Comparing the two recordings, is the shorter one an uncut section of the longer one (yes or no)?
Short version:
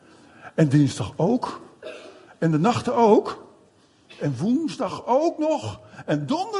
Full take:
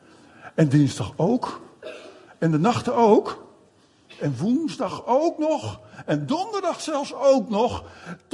yes